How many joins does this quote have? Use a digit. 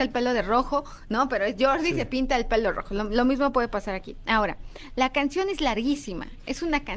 0